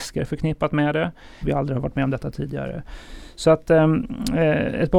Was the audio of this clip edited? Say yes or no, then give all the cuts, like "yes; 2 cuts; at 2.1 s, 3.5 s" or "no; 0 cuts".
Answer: yes; 1 cut; at 1.4 s